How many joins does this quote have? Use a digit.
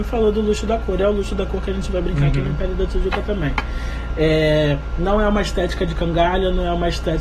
0